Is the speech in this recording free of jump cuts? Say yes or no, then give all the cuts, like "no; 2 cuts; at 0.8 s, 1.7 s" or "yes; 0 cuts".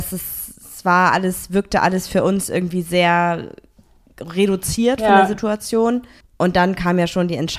no; 1 cut; at 6.2 s